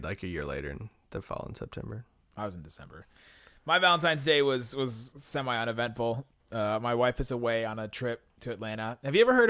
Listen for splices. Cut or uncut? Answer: uncut